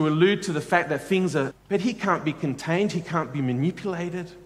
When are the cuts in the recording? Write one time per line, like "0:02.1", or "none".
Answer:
0:01.5